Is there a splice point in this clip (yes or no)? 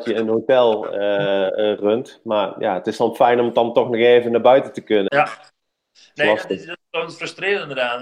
yes